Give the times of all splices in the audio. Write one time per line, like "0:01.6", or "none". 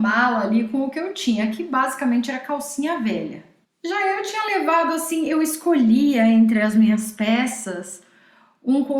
0:03.6

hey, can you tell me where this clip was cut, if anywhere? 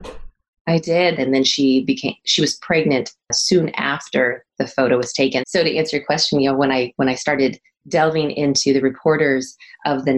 0:01.2
0:05.4

